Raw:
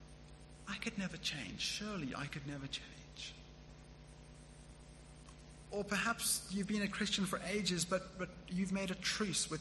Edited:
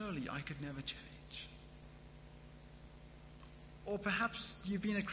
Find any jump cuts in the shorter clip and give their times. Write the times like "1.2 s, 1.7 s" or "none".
none